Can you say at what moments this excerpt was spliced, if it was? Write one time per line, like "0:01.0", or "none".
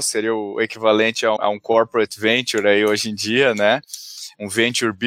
0:01.4